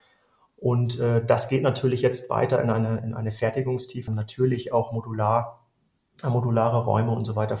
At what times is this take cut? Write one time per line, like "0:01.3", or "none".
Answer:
0:04.1